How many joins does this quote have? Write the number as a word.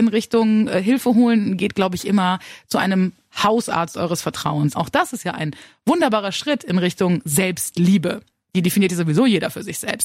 one